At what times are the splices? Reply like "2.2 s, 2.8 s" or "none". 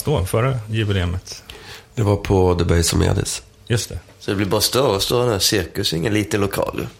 none

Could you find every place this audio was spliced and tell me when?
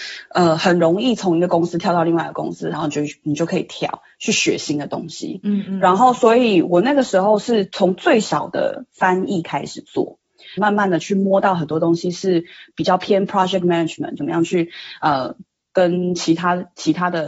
2.7 s, 10.6 s, 14.2 s

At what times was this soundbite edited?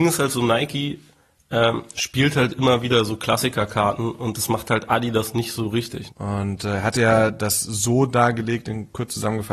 6.1 s

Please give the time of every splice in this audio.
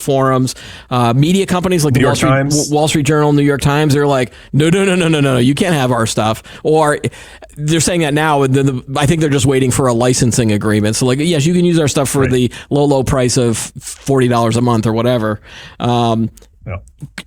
none

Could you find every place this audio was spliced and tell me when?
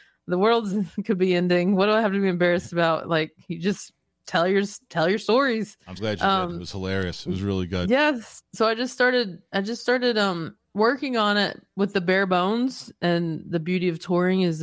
6.0 s, 10.6 s

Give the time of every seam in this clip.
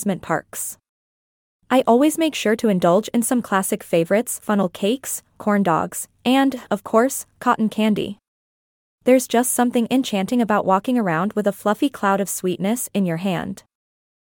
4.4 s

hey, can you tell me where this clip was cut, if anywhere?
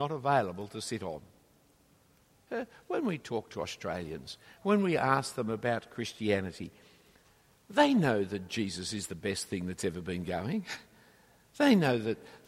none

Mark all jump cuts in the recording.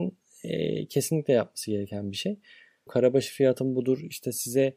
2.9 s

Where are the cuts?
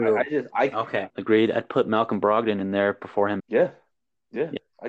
1.1 s, 3.4 s

